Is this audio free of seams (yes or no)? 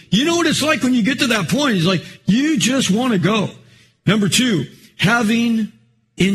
yes